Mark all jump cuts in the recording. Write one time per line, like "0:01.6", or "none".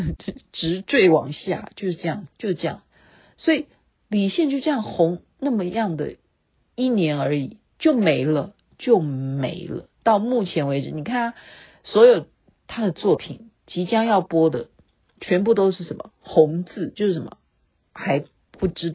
0:02.3